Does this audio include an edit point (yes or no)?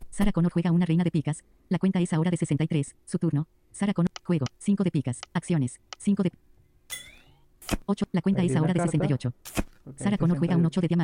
no